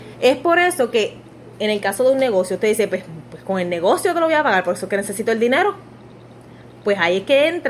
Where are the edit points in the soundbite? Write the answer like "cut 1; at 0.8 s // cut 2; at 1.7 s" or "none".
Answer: none